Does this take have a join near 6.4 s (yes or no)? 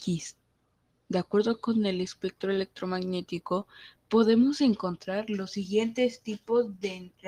no